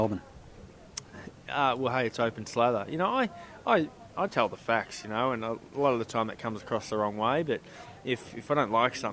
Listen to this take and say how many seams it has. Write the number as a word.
one